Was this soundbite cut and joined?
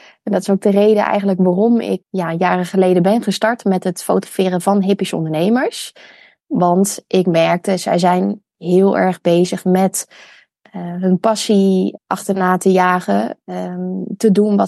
yes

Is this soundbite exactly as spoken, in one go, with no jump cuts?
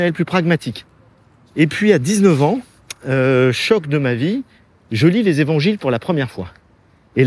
yes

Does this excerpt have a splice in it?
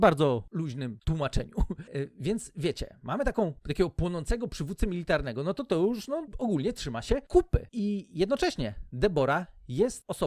no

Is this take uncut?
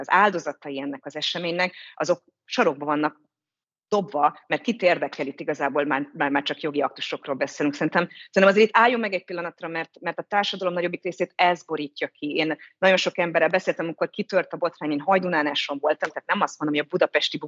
yes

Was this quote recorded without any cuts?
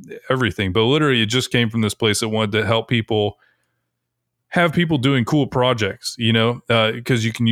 yes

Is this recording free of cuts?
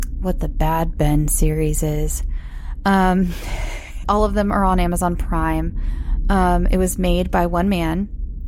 no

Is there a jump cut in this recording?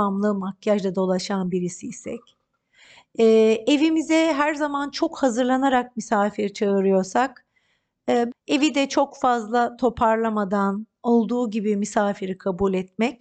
yes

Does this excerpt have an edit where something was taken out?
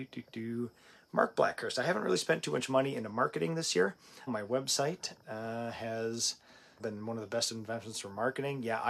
yes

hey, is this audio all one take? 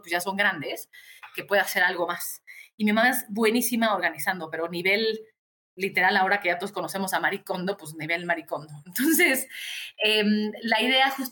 yes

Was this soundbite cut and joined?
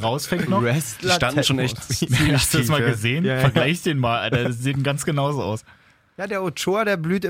no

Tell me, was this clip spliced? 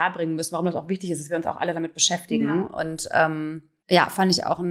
no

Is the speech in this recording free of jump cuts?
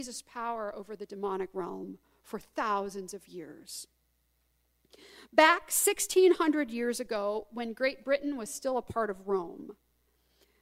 yes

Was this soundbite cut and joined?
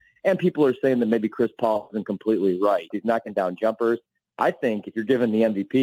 yes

